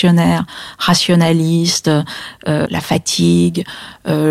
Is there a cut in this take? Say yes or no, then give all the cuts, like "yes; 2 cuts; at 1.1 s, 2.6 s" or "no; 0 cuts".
yes; 1 cut; at 2.6 s